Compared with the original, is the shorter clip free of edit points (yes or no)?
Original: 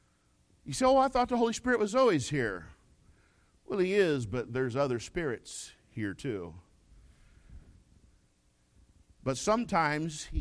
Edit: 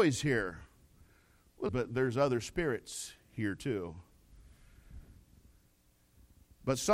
no